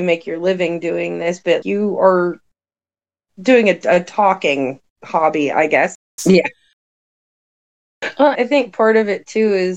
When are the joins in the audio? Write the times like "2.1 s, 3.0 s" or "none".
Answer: 1.6 s, 6.2 s, 8.3 s